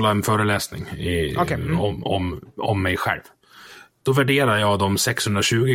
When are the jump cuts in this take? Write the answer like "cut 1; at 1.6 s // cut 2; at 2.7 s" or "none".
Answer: cut 1; at 4.0 s